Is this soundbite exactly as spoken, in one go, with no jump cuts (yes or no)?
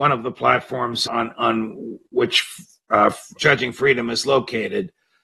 no